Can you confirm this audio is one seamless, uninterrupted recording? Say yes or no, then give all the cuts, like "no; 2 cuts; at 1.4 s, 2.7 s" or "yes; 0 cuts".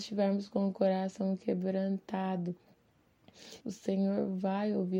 no; 1 cut; at 3.6 s